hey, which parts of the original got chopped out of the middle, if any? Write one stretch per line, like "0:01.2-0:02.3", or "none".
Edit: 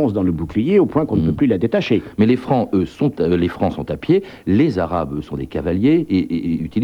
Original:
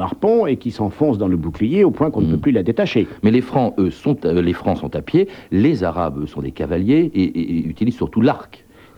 none